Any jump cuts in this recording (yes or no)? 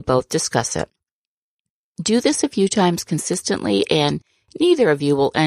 no